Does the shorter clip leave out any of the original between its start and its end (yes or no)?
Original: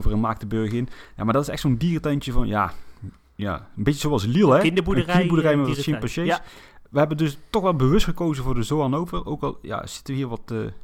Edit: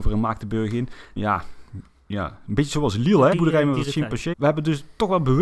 yes